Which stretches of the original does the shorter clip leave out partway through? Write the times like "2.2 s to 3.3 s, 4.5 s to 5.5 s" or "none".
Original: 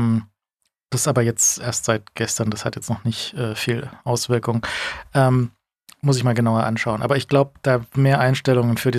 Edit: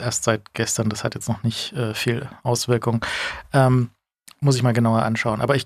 none

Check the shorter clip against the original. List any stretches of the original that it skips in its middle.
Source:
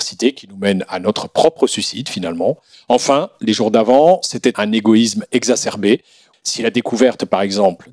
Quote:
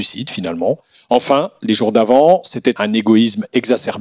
none

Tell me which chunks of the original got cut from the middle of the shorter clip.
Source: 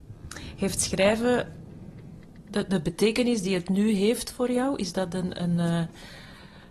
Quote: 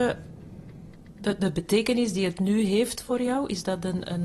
none

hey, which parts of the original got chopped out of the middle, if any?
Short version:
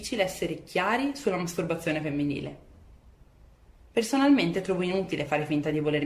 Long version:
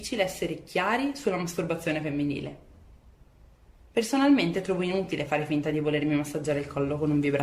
none

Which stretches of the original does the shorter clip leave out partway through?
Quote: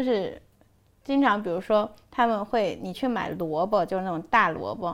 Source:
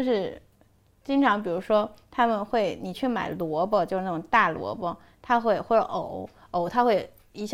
none

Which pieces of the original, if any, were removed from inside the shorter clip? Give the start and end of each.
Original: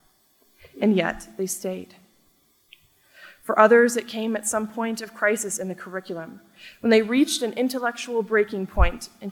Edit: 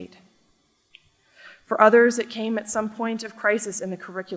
none

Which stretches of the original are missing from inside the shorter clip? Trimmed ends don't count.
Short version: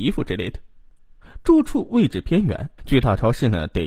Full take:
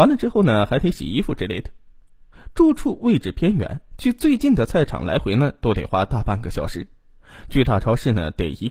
3.9 s to 7.4 s

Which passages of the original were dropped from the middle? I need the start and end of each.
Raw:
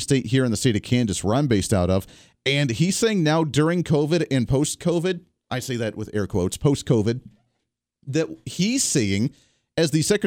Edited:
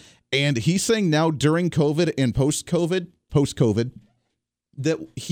5.4 s to 6.6 s

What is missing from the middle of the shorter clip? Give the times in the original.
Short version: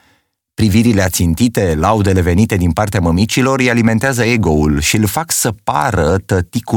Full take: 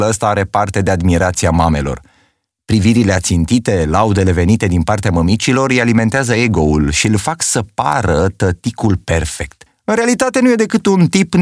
none

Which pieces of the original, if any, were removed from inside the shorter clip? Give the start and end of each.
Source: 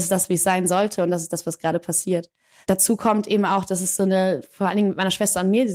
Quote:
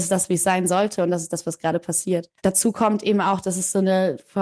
2.4 s to 2.6 s

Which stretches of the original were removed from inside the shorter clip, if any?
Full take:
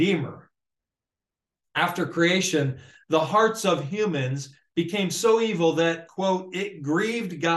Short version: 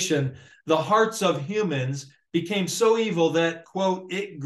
none

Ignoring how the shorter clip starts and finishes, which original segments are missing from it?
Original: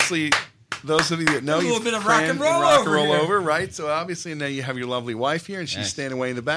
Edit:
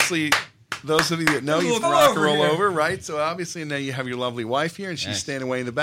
1.8 s to 2.5 s

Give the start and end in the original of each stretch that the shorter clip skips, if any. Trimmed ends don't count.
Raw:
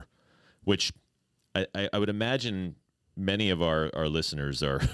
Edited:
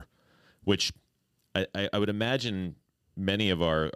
none

